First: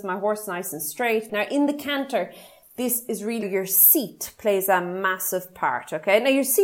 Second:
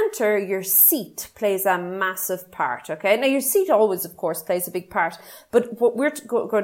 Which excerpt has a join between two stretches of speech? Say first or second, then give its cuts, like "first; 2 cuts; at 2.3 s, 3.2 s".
first; 2 cuts; at 1.3 s, 3.4 s